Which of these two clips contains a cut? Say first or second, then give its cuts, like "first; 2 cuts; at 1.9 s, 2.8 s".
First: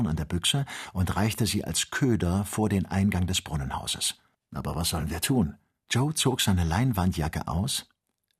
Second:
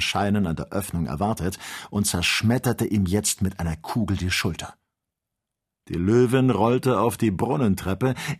first; 2 cuts; at 4.3 s, 5.9 s